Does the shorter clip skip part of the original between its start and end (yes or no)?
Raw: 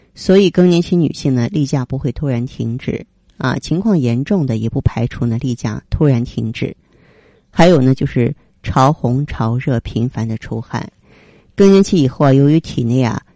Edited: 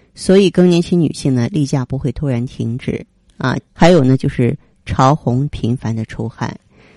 yes